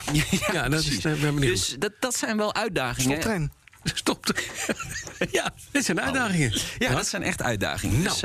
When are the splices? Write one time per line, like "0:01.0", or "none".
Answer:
none